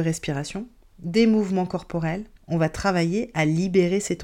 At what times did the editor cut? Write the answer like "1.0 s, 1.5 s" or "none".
2.4 s